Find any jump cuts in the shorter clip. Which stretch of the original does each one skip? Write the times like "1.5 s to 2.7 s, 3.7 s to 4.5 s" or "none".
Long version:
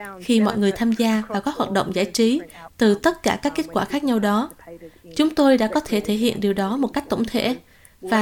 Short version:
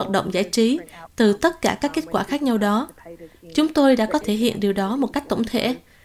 5.8 s to 6.0 s